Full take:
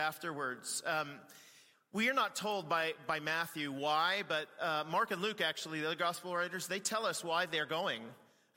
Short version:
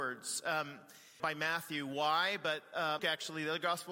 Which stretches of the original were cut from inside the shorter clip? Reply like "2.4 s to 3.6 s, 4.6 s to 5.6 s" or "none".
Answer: 1.6 s to 3.1 s, 4.8 s to 5.4 s